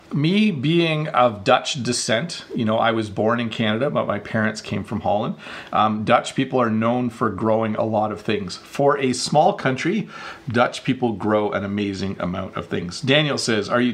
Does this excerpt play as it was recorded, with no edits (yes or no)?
yes